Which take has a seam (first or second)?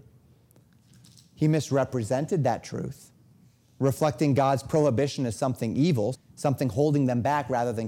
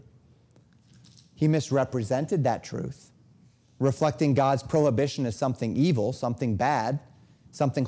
first